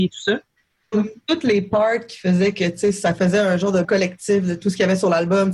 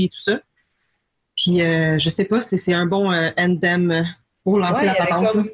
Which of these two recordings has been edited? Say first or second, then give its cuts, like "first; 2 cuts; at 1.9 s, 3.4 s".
first; 2 cuts; at 0.9 s, 3.8 s